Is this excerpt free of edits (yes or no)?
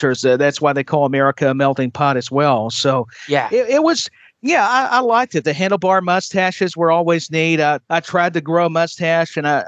no